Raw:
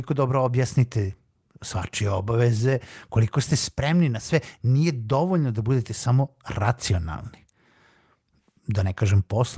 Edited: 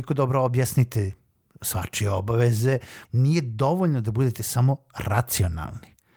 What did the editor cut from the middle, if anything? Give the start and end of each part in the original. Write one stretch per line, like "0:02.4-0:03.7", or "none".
0:03.1-0:04.6